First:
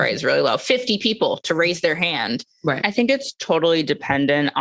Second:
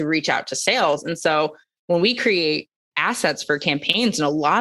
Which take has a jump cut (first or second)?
first